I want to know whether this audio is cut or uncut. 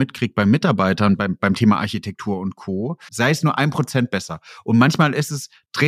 cut